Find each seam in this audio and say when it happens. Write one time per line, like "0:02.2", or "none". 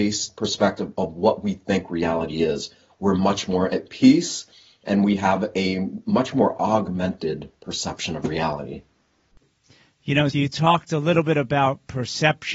0:10.3